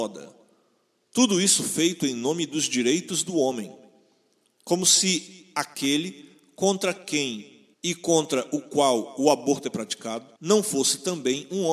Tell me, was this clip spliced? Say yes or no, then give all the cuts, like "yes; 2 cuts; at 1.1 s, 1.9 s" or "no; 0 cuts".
yes; 3 cuts; at 1.0 s, 7.7 s, 10.4 s